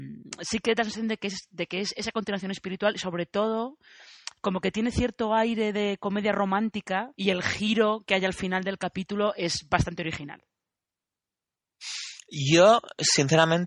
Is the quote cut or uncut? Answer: cut